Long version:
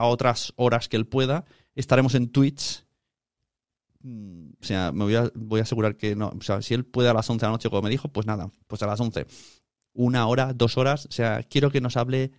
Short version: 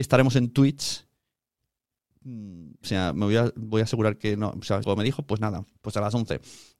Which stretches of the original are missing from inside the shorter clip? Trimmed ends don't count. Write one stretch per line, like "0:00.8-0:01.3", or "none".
0:06.6-0:07.7